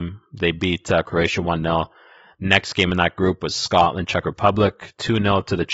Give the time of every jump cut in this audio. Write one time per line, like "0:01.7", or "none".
none